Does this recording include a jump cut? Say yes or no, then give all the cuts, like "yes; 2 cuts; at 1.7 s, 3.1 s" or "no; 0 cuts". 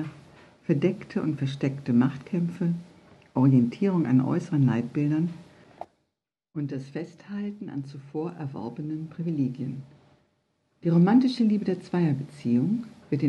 no; 0 cuts